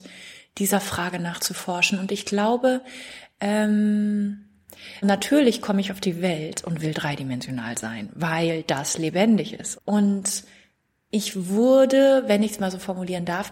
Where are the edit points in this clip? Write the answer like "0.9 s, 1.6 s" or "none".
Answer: 5.0 s, 9.8 s